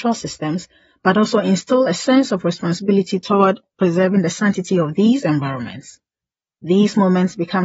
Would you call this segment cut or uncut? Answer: cut